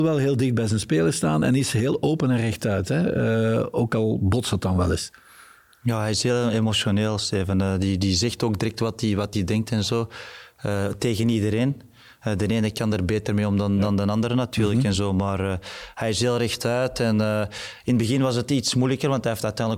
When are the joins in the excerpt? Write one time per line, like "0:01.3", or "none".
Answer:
none